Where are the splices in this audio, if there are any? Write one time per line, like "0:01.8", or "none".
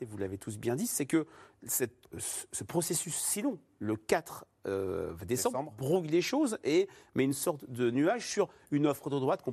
0:02.0